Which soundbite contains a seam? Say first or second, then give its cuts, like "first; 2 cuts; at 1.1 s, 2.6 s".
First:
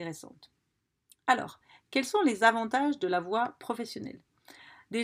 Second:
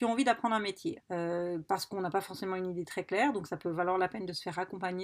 second; 1 cut; at 1.0 s